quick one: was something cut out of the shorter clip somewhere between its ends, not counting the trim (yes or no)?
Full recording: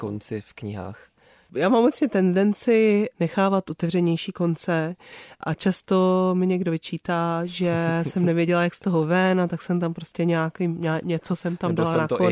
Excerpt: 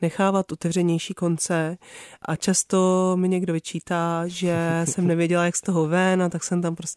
no